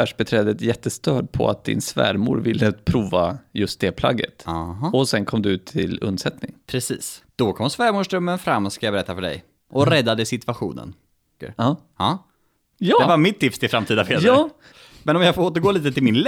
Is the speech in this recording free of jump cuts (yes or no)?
no